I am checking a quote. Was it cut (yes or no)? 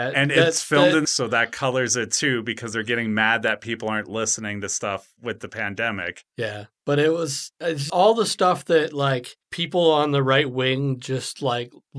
yes